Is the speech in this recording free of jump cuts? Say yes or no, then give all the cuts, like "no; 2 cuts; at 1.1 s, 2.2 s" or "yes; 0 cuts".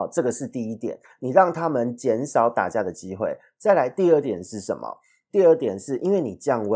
yes; 0 cuts